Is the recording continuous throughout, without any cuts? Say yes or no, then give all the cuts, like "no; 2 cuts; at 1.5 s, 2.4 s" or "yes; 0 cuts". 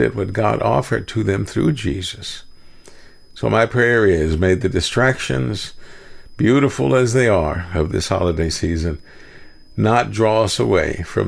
yes; 0 cuts